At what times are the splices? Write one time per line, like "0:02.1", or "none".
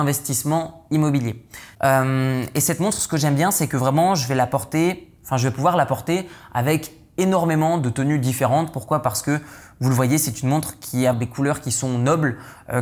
0:01.7
0:11.1